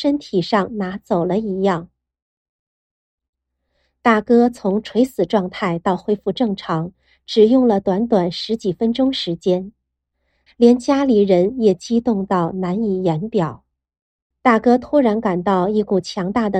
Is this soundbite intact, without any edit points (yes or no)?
no